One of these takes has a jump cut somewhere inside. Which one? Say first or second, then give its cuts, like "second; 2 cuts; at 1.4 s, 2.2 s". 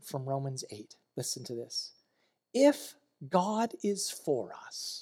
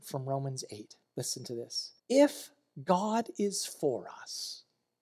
second; 1 cut; at 2.0 s